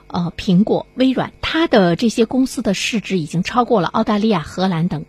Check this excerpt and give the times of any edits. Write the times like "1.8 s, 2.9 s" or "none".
1.3 s